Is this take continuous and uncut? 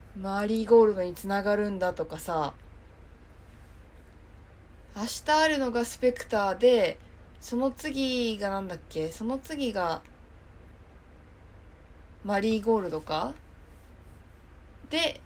yes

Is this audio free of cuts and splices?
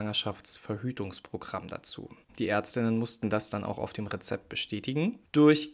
no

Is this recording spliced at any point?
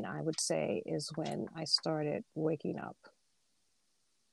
yes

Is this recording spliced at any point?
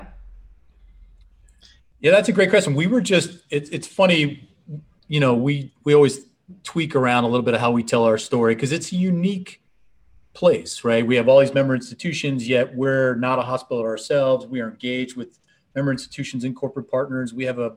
no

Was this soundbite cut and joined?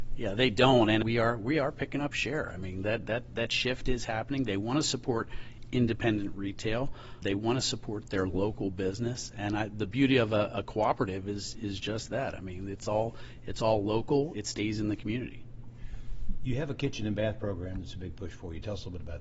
no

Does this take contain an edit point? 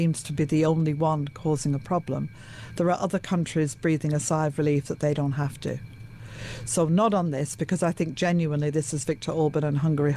no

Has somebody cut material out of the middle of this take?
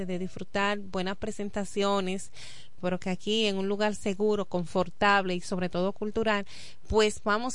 yes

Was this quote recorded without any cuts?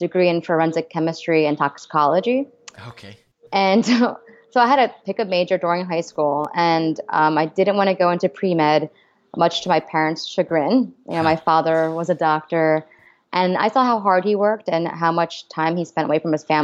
yes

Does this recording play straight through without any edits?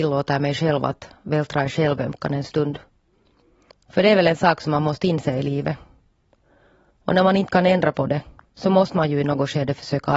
no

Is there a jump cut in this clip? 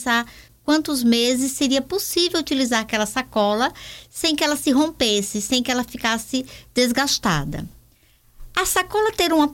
no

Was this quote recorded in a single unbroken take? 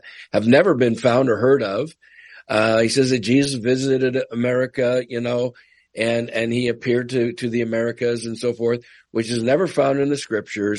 yes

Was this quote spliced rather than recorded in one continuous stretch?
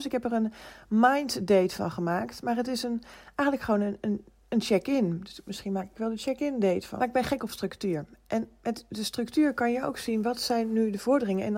yes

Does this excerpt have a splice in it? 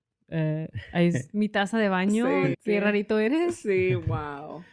yes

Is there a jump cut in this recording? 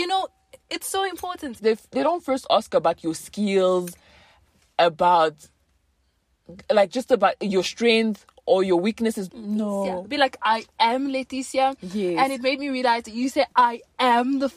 yes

